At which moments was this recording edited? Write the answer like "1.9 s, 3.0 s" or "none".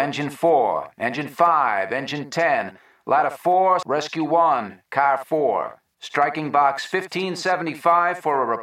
3.8 s